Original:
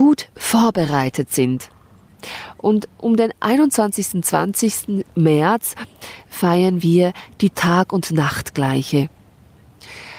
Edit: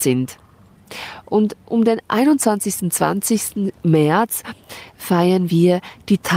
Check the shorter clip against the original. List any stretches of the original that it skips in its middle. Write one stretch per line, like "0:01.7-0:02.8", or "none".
none